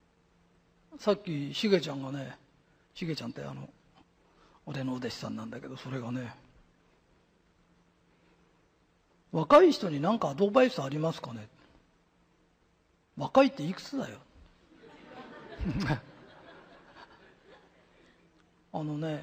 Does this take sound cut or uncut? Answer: uncut